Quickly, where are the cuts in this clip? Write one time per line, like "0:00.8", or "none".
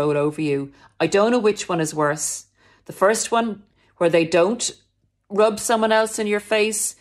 none